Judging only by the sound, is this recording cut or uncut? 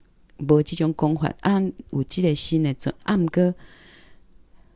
cut